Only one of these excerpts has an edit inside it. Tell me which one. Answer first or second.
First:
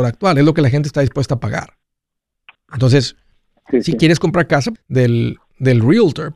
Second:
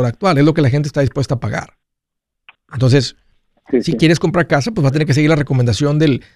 first